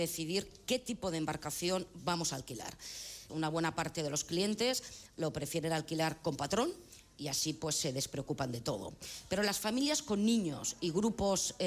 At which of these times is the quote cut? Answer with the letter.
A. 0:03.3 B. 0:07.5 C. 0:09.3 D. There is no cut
A